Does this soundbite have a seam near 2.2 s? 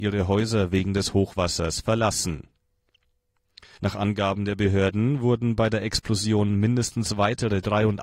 no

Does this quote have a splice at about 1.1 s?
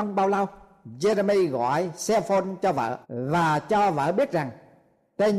no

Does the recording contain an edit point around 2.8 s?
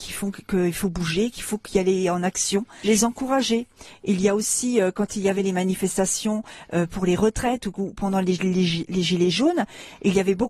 yes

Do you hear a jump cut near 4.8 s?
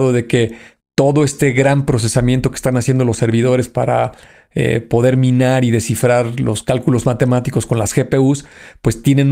no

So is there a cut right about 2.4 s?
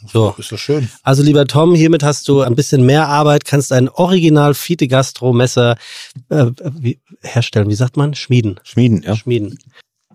yes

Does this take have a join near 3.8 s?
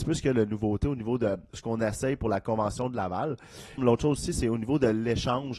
yes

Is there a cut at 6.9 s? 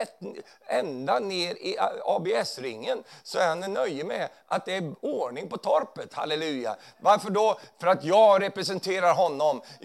no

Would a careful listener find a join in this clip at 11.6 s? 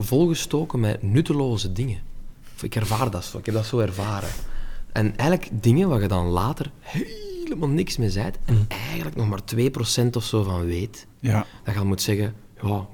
no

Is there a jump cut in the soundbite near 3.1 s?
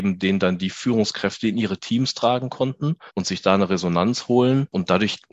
yes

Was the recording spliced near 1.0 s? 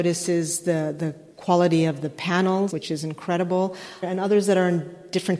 no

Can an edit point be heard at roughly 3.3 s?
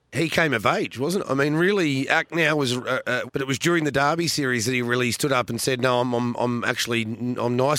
yes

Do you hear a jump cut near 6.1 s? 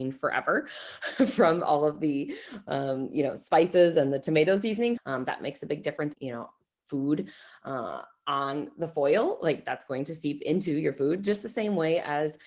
yes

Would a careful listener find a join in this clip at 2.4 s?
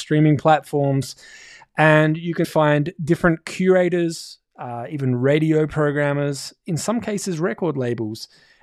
yes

